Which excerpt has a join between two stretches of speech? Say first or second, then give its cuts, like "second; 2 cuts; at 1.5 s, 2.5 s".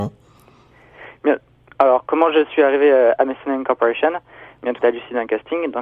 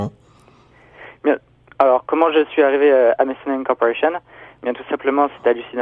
first; 1 cut; at 4.8 s